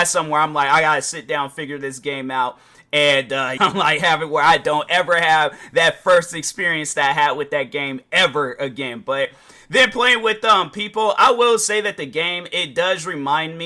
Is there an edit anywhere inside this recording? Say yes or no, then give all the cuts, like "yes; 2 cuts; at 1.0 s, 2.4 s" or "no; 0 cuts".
yes; 1 cut; at 3.6 s